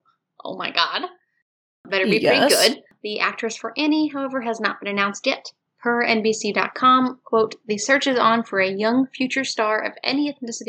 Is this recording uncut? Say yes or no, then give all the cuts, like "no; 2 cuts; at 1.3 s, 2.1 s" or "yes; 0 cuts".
yes; 0 cuts